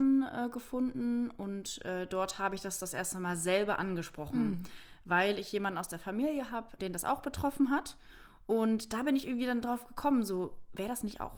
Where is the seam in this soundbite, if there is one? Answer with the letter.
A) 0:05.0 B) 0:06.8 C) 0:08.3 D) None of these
B